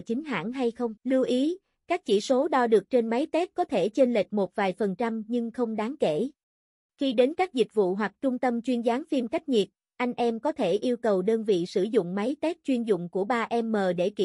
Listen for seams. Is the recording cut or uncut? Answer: cut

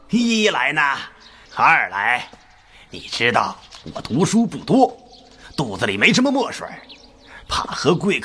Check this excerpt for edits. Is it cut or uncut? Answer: cut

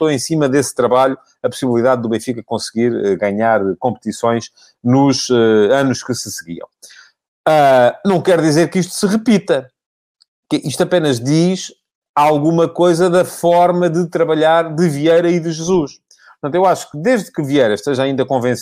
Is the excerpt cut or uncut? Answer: uncut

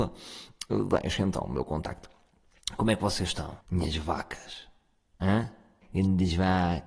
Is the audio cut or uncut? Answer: cut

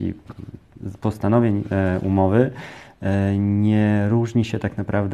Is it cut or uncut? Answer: uncut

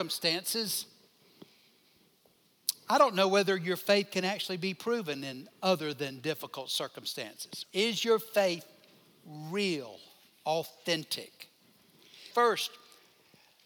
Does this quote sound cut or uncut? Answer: cut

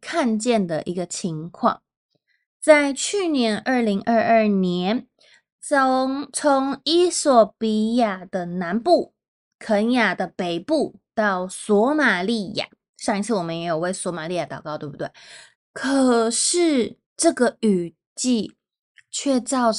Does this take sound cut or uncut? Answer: cut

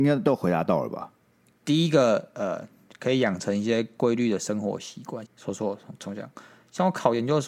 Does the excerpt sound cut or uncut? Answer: cut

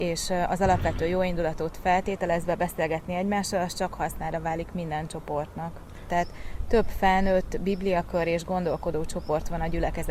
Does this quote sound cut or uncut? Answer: cut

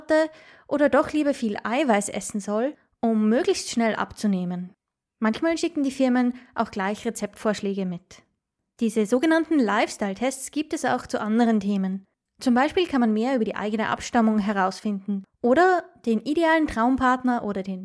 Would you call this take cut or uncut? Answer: uncut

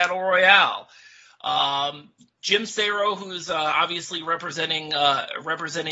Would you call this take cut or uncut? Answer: uncut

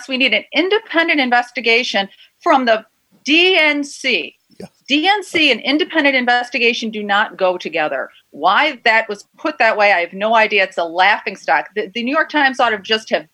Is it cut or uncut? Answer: uncut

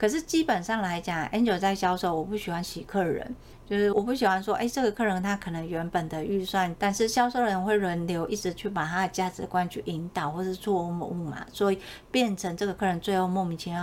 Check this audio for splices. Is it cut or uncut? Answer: cut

